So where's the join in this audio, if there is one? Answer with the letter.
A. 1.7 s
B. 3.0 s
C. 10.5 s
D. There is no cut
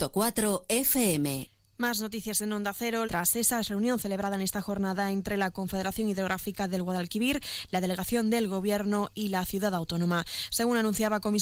B